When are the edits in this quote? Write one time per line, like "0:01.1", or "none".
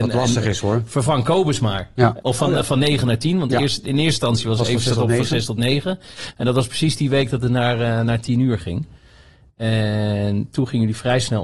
0:02.2